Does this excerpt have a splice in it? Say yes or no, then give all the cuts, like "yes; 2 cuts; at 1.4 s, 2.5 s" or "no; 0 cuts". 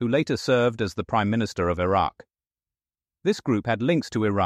no; 0 cuts